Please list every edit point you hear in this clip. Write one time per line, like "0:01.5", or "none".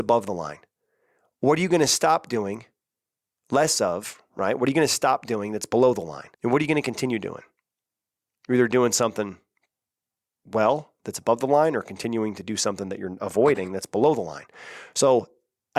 0:06.3